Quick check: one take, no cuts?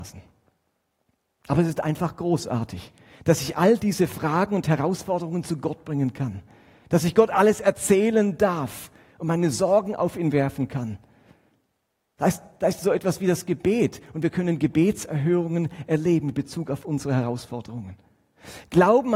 yes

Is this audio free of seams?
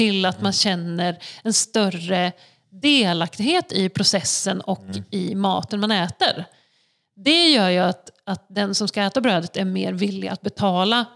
yes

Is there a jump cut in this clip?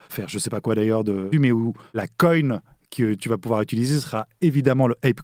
yes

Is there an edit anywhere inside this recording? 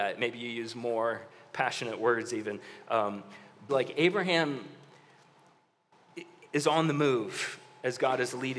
yes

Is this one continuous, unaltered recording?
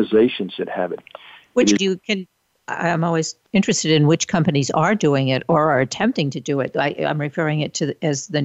no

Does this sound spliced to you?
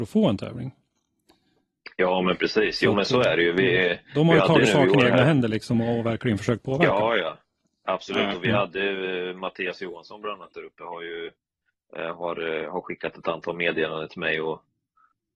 no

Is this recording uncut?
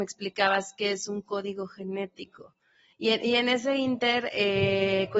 no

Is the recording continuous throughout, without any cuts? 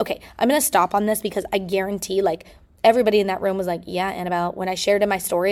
yes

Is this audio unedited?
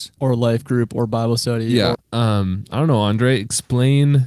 no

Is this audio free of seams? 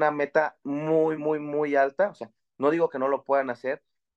no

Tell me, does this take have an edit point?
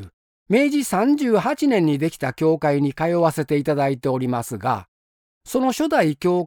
no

